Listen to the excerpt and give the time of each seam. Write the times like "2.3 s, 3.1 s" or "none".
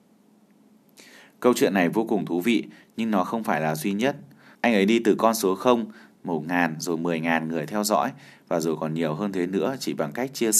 4.5 s, 6.1 s

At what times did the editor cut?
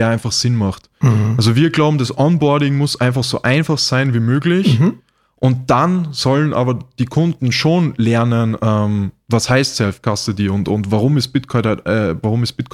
none

